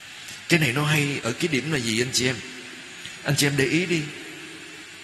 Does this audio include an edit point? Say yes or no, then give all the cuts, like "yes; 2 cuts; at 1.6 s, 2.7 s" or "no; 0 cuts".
yes; 1 cut; at 1.2 s